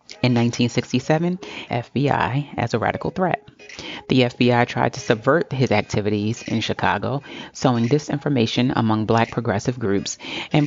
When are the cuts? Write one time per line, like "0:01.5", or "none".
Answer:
0:01.7